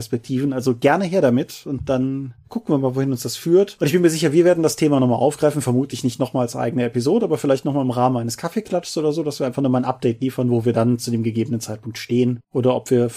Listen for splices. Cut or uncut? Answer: uncut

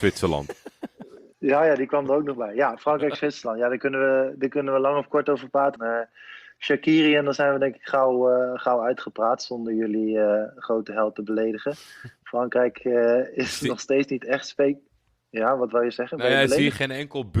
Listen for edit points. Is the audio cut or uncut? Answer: cut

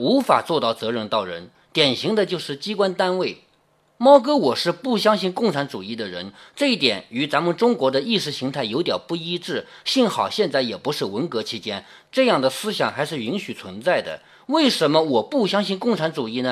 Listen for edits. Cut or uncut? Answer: uncut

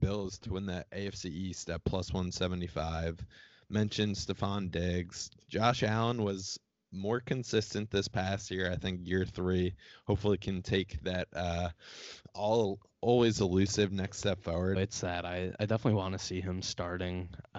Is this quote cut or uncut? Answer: cut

